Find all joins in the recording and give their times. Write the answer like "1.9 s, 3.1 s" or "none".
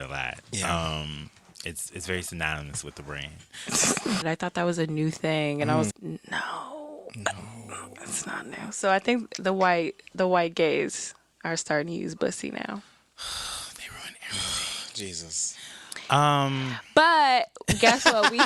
4.2 s, 5.9 s

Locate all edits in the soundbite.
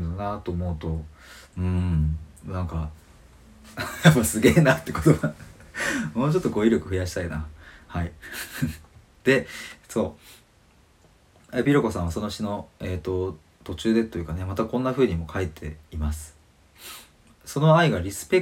none

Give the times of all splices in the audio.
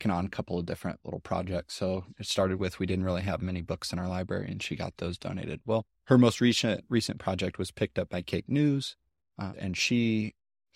5.9 s, 9.5 s

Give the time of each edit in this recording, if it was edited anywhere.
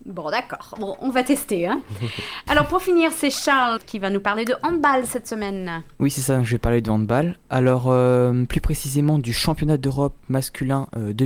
3.8 s

